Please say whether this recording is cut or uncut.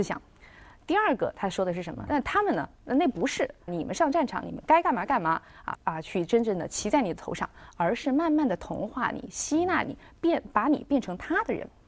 cut